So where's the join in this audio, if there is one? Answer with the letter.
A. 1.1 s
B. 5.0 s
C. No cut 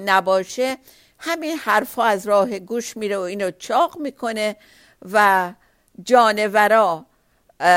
C